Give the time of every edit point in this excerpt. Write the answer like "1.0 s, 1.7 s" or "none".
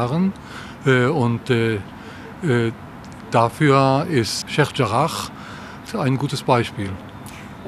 4.4 s, 5.9 s